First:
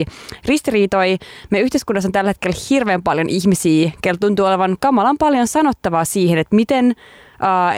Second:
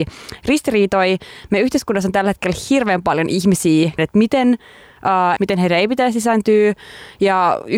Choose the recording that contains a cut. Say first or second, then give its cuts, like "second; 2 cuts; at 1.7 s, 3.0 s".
second; 2 cuts; at 4.0 s, 5.4 s